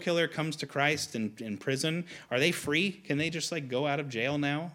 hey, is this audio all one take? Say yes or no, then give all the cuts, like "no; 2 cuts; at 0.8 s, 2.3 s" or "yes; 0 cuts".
yes; 0 cuts